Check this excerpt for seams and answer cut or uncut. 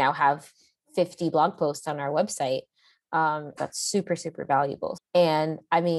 cut